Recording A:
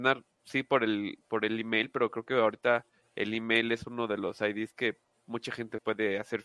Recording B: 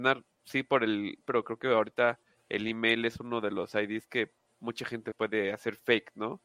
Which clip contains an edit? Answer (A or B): B